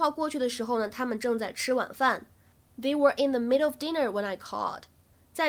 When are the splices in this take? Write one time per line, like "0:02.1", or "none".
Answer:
none